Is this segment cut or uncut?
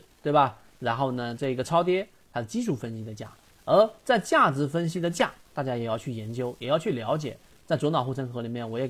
uncut